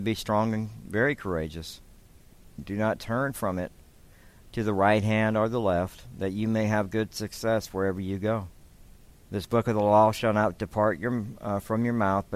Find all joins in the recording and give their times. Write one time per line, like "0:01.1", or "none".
0:02.6